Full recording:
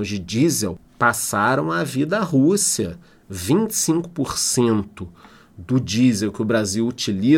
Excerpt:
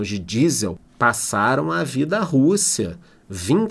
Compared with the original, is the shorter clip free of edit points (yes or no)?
yes